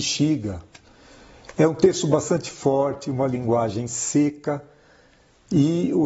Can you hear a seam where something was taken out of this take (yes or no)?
no